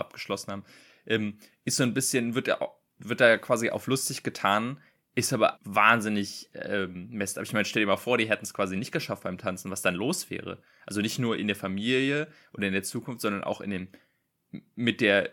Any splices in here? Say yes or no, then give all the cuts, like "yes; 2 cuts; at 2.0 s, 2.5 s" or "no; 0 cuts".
yes; 1 cut; at 5.6 s